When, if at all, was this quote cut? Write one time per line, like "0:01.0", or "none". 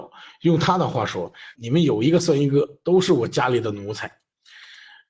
0:01.5